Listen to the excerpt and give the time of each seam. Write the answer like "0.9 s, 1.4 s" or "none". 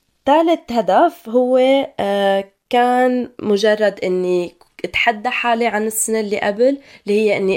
none

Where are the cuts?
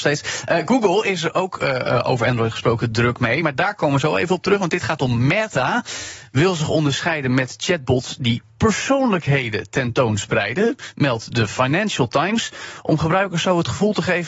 none

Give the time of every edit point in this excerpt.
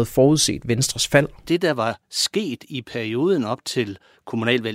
none

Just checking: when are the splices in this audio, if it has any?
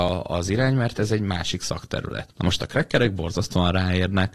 none

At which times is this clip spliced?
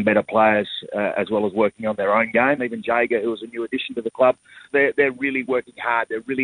2.6 s, 4.7 s

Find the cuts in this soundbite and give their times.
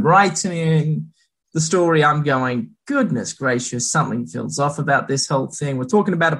none

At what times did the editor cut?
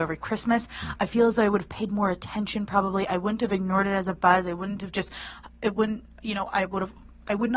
none

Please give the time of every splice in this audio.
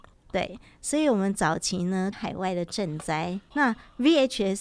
2.1 s, 3.5 s

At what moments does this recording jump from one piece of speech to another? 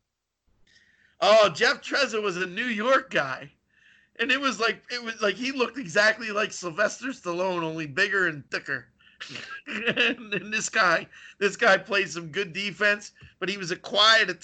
none

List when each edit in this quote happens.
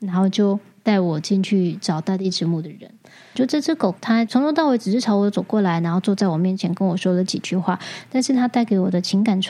3.4 s

